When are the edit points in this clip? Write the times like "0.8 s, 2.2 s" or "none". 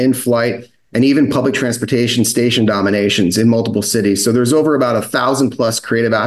none

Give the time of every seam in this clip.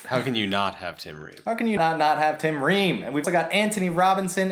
1.8 s, 3.2 s

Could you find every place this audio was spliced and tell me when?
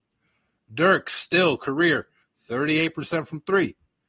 none

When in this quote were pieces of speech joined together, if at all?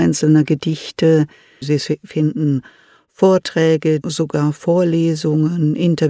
1.6 s, 4.0 s

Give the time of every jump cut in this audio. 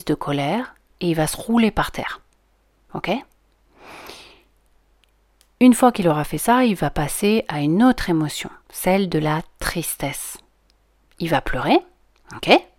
8.6 s

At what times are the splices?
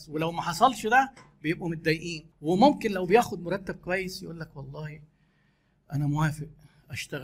2.3 s

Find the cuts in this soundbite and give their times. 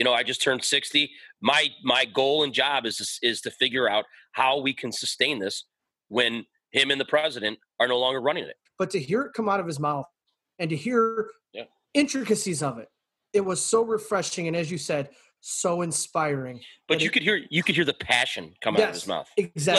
8.7 s

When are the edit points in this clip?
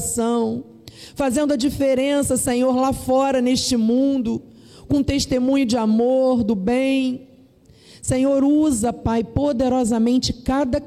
none

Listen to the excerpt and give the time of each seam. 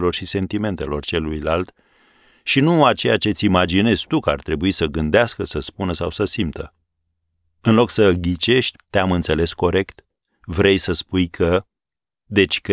8.8 s

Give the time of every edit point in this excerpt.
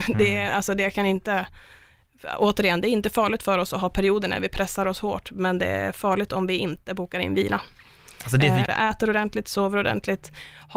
8.6 s

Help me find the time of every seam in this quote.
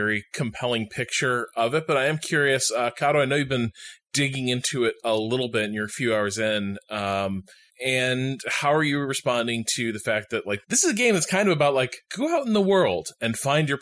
7.7 s, 10.6 s, 12.1 s

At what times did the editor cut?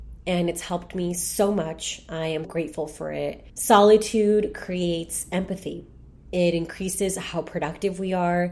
2.4 s

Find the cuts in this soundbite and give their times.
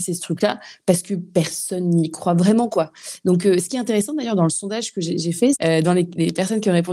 5.5 s

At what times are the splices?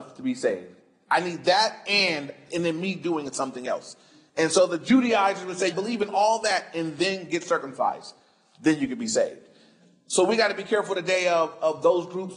5.7 s

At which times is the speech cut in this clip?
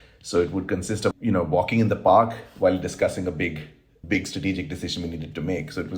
1.1 s

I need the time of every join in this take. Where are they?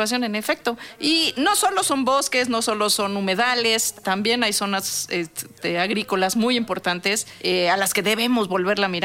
none

